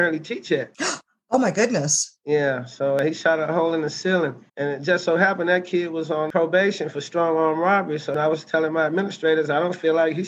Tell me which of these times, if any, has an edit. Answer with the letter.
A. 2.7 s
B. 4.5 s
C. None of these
B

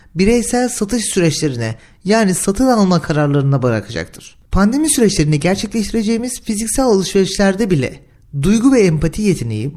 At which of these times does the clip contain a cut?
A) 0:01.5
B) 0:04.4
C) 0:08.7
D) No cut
B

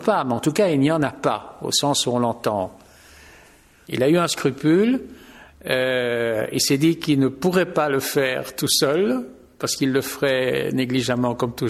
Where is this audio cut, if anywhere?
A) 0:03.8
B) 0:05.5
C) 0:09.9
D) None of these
A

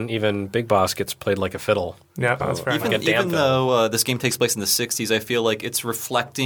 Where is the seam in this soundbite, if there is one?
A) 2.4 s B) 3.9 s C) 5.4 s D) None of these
A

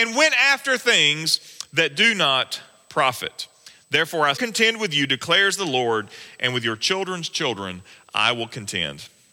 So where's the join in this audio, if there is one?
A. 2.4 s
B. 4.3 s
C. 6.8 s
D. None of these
B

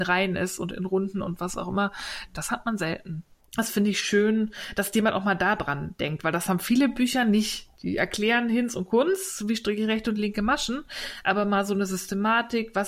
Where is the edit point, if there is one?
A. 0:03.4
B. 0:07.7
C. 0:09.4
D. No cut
A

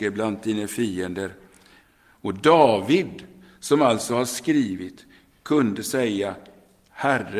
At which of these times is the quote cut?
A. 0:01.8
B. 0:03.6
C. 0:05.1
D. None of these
A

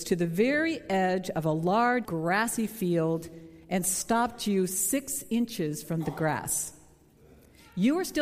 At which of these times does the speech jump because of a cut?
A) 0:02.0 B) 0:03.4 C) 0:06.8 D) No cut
A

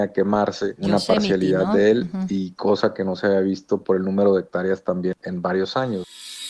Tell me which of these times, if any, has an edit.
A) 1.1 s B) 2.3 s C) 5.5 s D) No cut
D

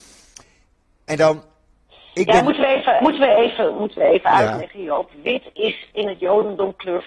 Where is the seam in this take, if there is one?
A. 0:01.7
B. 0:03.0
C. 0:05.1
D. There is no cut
B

